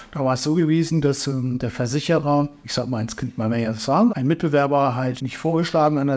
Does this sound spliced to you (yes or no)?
yes